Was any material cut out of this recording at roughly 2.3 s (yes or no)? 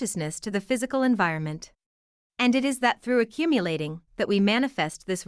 yes